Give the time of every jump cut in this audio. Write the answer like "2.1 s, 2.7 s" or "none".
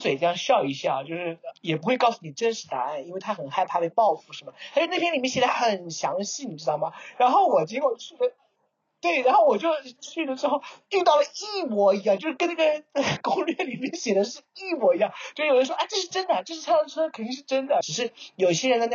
17.8 s